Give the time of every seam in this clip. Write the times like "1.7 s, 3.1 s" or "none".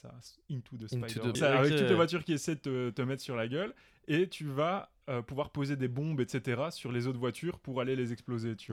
1.4 s